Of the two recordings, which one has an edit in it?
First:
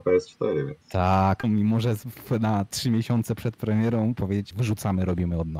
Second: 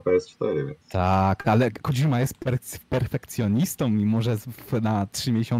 first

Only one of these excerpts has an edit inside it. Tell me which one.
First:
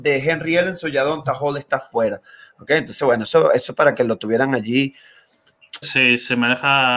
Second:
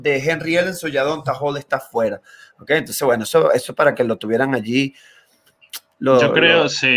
first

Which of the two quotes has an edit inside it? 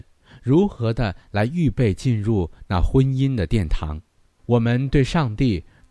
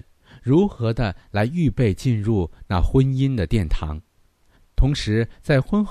first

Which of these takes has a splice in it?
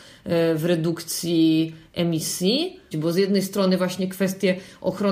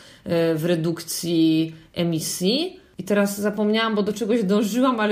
first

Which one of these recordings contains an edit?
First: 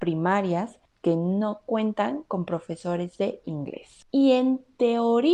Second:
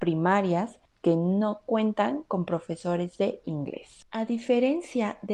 first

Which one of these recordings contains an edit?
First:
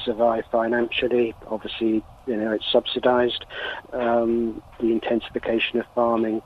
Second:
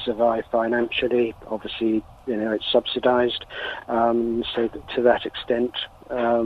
first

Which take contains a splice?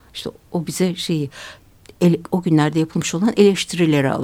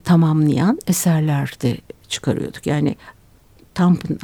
first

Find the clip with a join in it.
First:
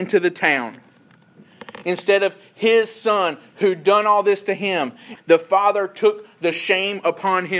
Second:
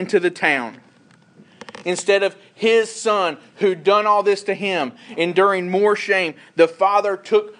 first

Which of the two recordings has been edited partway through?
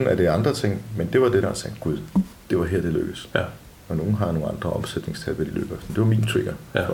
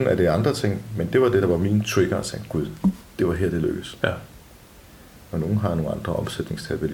first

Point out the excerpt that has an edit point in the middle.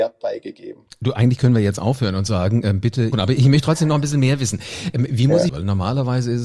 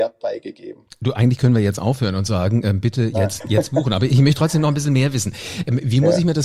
first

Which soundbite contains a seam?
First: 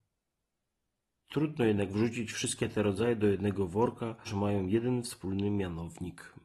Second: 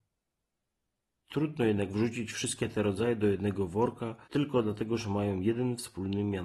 first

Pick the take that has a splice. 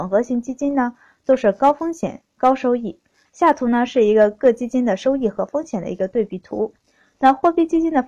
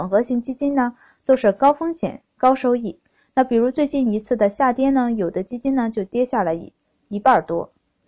first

